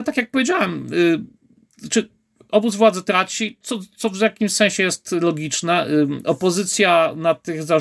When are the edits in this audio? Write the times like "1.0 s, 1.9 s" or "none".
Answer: none